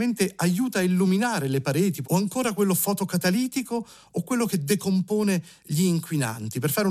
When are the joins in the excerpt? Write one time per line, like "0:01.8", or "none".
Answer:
0:02.0